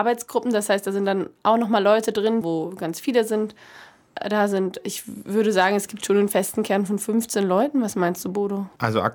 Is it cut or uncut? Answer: cut